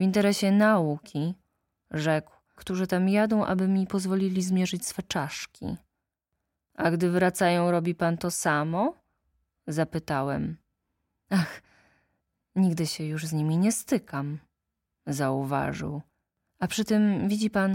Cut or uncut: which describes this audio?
cut